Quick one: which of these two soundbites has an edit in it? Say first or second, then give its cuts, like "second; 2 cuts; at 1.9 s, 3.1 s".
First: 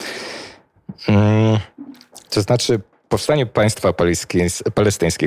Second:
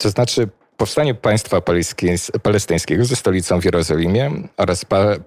first; 1 cut; at 2.3 s